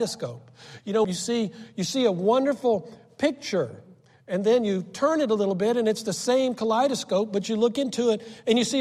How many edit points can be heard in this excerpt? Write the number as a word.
one